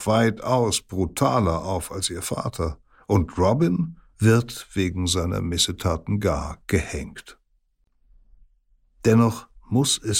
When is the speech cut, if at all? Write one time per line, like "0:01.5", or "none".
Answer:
0:04.1